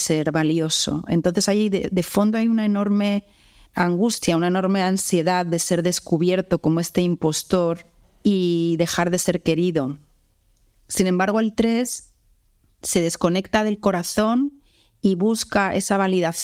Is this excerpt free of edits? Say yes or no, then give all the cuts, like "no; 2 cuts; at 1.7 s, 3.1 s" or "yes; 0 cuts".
no; 1 cut; at 10.8 s